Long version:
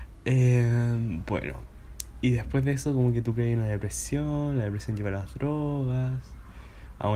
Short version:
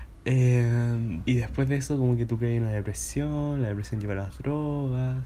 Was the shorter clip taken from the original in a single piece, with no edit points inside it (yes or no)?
no